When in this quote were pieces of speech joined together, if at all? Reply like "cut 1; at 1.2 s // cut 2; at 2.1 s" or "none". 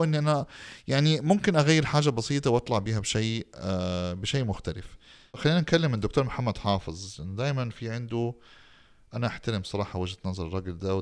none